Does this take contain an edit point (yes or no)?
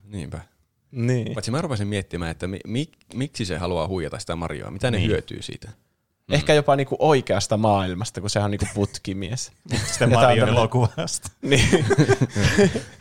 yes